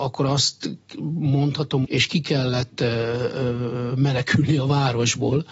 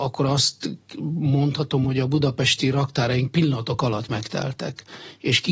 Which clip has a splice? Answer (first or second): first